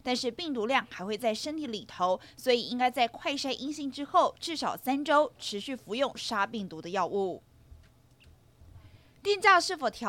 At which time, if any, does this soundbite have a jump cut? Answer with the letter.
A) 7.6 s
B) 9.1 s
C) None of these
C